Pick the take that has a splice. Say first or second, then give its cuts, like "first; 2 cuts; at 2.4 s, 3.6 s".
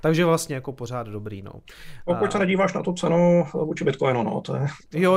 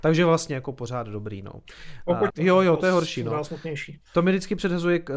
second; 1 cut; at 2.3 s